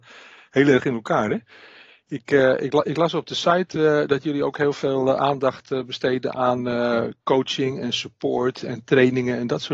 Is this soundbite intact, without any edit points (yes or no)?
yes